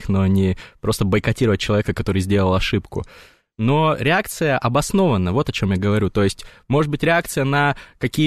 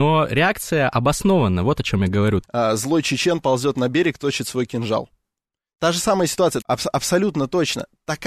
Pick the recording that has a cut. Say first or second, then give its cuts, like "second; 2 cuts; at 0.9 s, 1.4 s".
second; 2 cuts; at 2.4 s, 6.6 s